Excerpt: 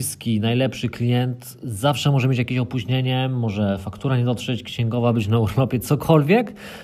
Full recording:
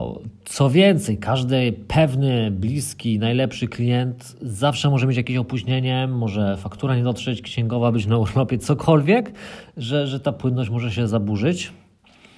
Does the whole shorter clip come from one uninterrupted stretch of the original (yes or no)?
yes